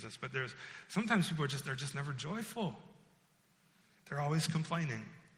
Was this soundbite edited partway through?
no; 0 cuts

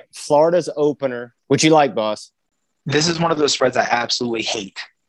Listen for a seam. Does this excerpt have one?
yes; 1 cut; at 1.4 s

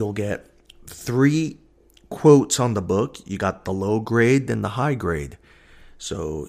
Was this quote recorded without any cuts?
no; 1 cut; at 4.5 s

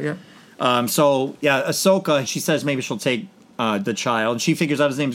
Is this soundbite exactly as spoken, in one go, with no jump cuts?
no; 1 cut; at 2.2 s

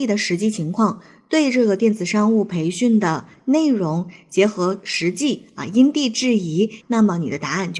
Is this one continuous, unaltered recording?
no; 1 cut; at 6.8 s

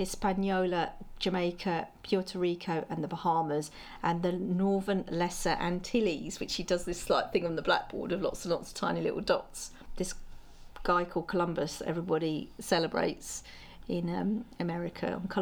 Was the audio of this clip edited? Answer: no; 0 cuts

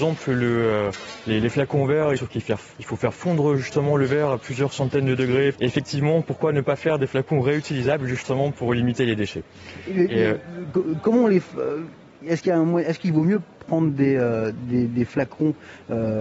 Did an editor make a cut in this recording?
yes; 2 cuts; at 2.2 s, 5.5 s

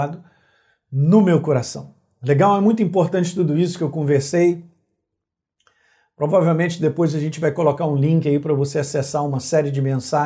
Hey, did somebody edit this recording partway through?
no; 0 cuts

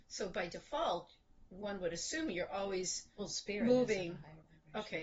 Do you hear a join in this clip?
no; 0 cuts

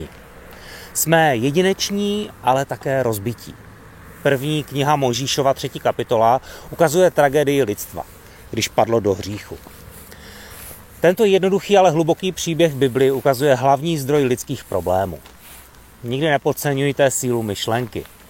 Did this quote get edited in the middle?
no; 0 cuts

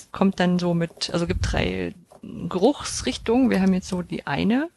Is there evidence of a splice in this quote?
no; 0 cuts

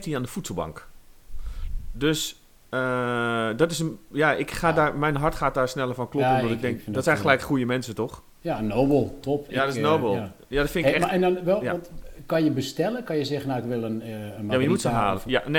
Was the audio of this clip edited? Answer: no; 0 cuts

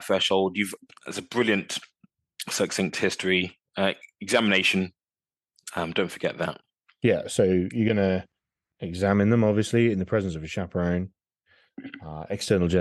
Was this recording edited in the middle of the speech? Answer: no; 0 cuts

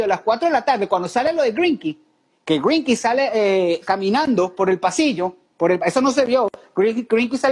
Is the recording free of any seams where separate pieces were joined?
yes; 0 cuts

